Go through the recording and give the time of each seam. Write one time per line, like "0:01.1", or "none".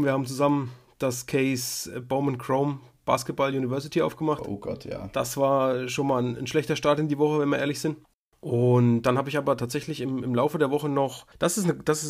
none